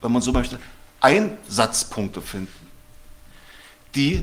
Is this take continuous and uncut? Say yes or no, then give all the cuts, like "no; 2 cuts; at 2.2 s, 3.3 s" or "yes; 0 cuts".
yes; 0 cuts